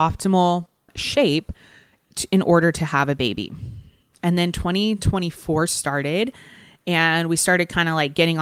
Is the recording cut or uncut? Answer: cut